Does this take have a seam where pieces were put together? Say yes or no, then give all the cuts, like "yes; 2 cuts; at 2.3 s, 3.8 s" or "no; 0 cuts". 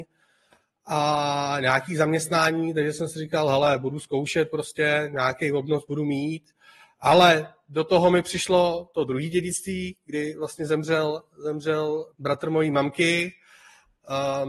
yes; 1 cut; at 12.1 s